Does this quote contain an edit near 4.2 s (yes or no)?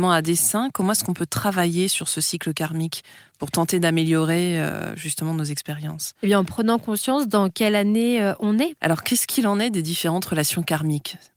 no